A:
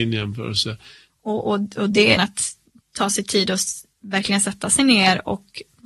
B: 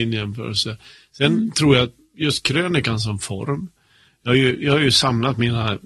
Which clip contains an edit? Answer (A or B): A